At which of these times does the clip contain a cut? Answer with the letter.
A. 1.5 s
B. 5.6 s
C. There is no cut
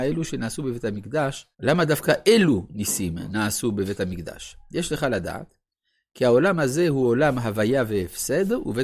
A